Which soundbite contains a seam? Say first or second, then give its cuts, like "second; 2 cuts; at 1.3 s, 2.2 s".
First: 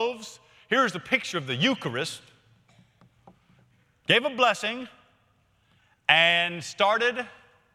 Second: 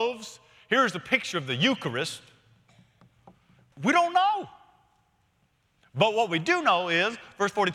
second; 1 cut; at 3.7 s